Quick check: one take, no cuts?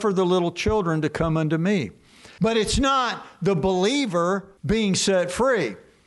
no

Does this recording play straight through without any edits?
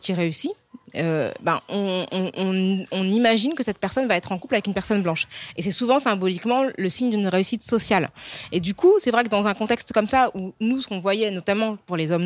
yes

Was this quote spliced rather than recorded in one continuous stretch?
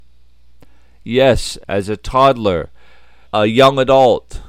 yes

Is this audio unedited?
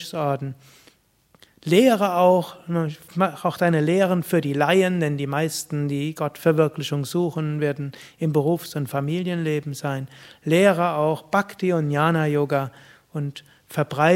yes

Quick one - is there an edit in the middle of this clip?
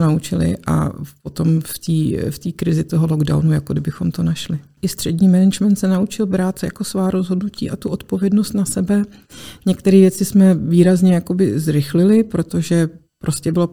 yes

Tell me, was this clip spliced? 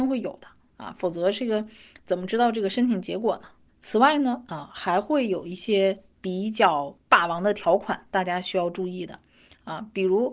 yes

